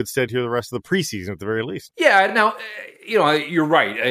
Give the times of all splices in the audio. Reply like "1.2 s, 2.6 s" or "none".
none